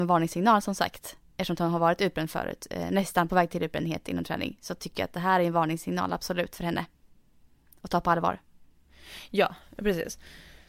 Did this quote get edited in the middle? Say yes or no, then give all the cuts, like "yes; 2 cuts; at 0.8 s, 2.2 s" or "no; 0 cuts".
no; 0 cuts